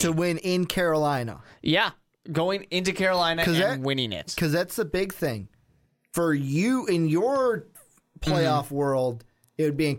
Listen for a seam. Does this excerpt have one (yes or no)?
no